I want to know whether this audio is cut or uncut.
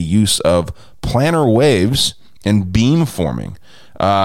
uncut